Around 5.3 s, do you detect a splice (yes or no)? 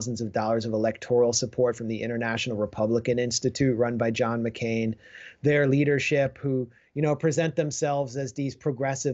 no